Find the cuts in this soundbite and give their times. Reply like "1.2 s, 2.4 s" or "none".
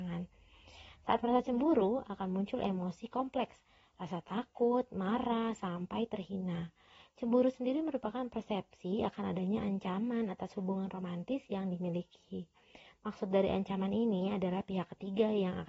none

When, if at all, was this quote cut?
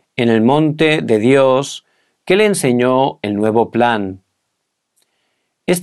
none

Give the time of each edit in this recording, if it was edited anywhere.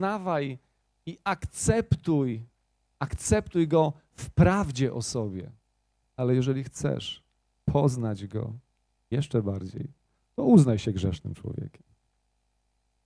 2.9 s, 6.0 s

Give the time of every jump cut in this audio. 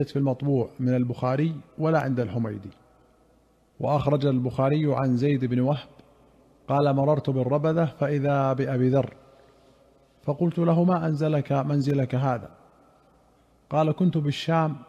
none

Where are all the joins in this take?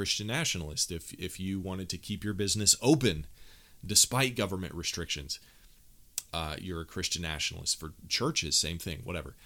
none

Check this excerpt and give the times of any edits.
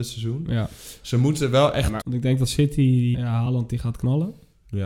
2.0 s, 3.1 s

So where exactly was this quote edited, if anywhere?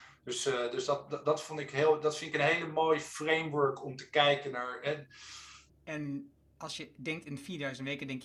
5.7 s

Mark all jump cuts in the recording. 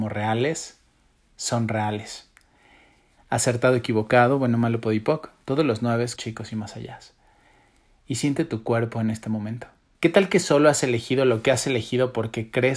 3.2 s, 6.2 s, 10.0 s

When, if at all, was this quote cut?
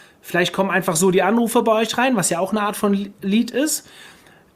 none

